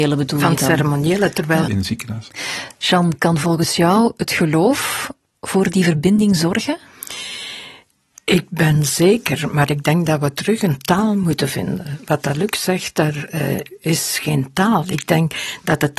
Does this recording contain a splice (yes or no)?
yes